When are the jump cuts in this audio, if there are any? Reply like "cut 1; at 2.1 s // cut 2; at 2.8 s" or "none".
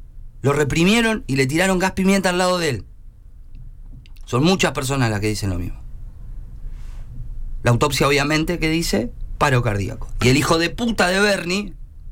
none